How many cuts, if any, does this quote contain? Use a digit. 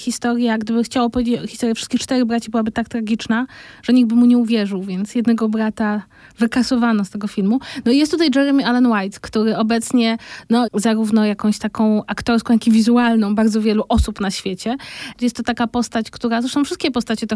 2